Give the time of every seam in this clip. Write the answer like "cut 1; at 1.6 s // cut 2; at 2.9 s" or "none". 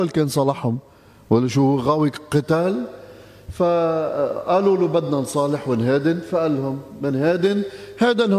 none